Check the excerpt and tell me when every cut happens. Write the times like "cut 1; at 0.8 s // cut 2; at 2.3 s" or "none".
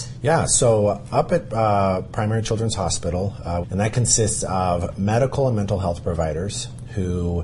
cut 1; at 3.6 s

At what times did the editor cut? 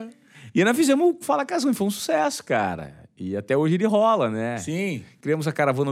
none

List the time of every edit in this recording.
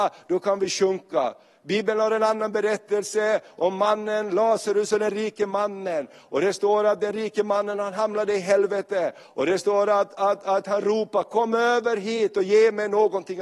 none

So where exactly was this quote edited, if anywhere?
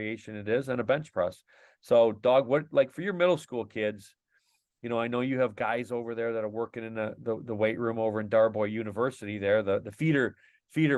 none

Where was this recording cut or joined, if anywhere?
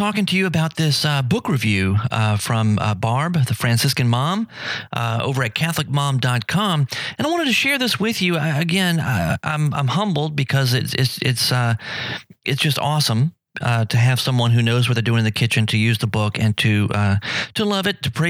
none

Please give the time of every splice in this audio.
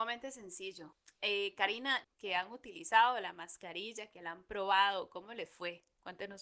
cut 1; at 2.0 s

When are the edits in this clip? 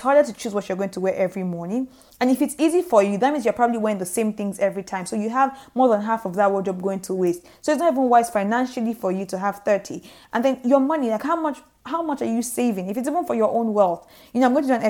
none

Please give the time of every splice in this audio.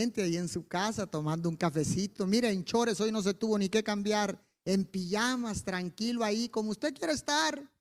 none

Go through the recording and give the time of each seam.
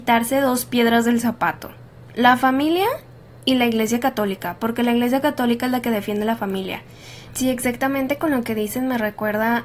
cut 1; at 7.3 s

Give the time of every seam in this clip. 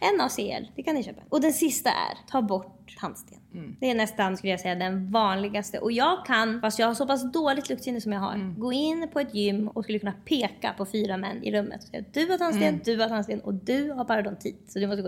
none

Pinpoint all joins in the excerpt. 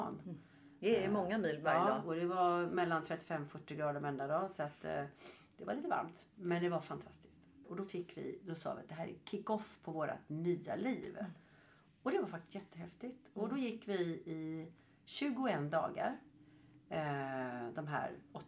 cut 1; at 7.6 s

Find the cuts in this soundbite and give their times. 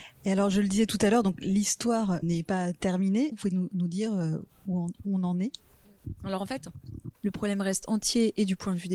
cut 1; at 2.2 s // cut 2; at 3.3 s // cut 3; at 7.1 s

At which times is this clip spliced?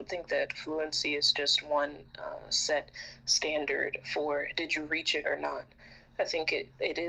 none

